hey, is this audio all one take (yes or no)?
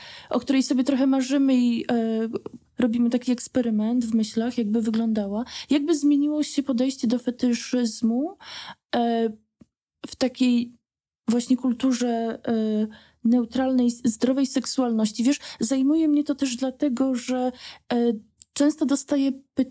yes